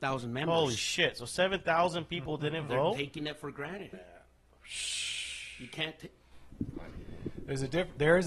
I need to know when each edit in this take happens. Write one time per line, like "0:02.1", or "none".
0:03.9